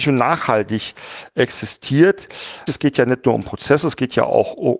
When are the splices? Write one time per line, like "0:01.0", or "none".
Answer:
0:02.7